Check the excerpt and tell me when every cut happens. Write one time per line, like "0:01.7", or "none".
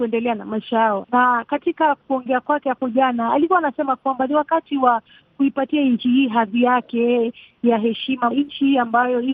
0:01.0
0:08.3